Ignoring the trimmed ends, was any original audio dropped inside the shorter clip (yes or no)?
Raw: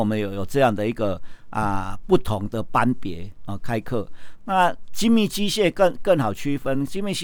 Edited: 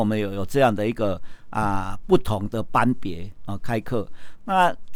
no